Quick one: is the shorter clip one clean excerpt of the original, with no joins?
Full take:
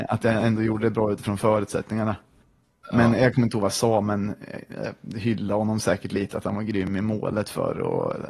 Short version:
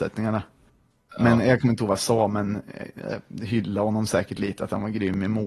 yes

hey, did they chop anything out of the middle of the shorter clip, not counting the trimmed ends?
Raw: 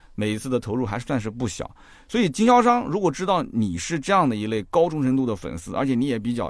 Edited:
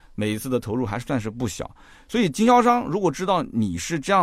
no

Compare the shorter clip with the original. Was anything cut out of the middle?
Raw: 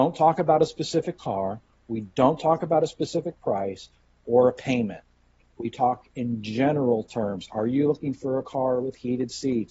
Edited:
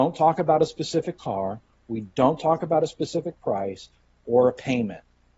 no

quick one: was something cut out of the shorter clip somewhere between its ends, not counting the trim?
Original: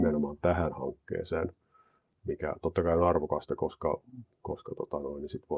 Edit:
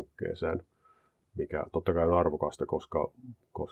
no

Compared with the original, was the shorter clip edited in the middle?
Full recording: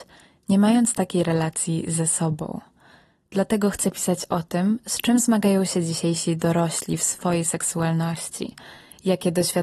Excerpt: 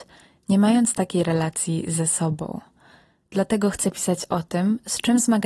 no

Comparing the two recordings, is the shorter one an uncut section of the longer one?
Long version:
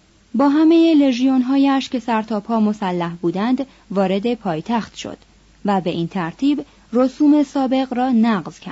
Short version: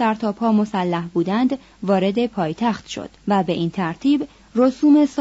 no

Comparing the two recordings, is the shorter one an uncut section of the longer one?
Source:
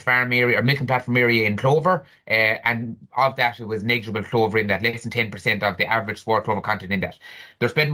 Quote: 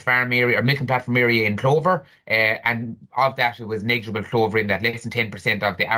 yes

